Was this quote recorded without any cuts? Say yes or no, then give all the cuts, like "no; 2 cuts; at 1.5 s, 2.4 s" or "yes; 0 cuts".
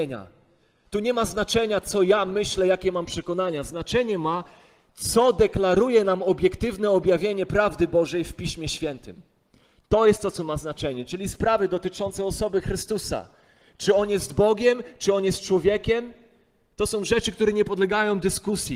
yes; 0 cuts